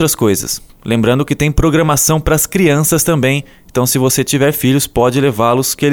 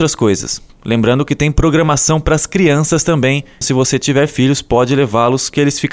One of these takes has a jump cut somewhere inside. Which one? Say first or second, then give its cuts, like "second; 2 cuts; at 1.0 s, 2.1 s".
second; 1 cut; at 3.6 s